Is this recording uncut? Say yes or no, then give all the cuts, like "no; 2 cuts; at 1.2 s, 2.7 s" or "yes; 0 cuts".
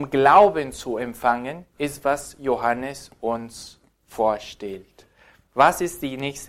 yes; 0 cuts